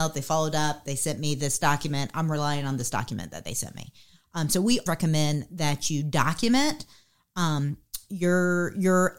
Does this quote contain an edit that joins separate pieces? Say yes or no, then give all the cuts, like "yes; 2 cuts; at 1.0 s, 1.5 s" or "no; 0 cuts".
yes; 1 cut; at 4.9 s